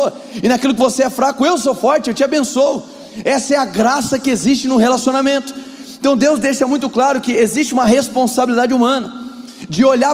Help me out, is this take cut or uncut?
uncut